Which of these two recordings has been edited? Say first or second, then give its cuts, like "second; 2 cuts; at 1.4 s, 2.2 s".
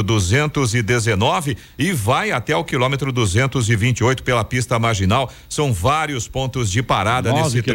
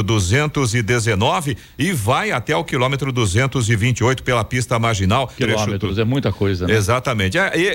second; 1 cut; at 5.4 s